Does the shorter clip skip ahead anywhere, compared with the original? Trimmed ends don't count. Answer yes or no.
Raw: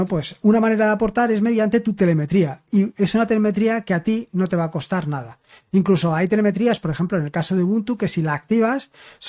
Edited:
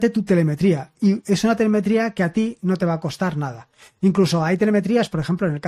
no